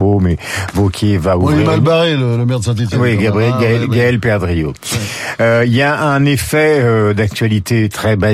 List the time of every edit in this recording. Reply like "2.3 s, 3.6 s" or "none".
none

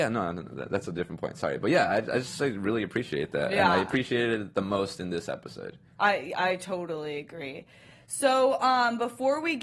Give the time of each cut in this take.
5.9 s

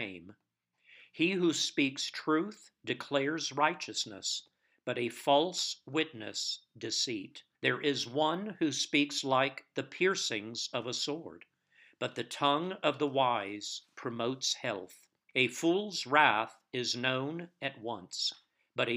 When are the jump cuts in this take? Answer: 7.5 s, 15.3 s

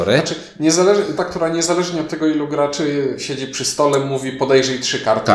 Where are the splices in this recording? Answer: 1.2 s

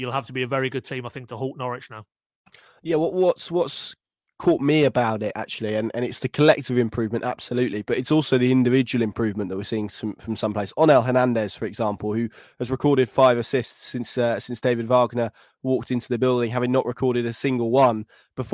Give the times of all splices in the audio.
none

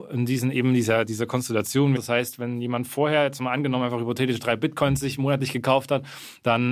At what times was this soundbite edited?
2.0 s

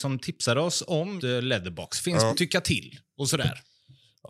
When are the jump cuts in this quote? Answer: 1.2 s, 2.3 s

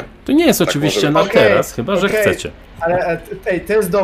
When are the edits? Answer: none

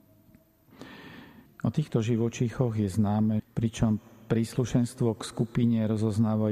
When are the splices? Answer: 1.5 s, 3.4 s

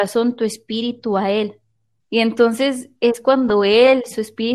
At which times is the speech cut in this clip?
2.0 s

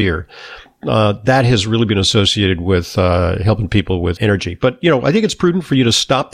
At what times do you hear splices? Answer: 4.2 s

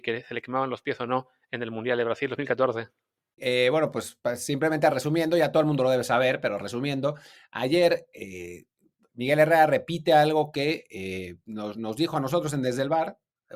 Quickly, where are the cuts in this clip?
3.4 s

